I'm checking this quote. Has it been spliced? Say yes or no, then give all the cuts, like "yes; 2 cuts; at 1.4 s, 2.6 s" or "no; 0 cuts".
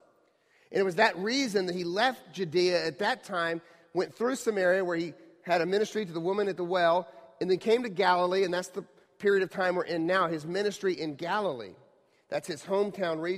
no; 0 cuts